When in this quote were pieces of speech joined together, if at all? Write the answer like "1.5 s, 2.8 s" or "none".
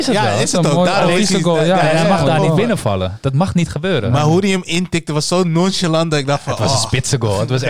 none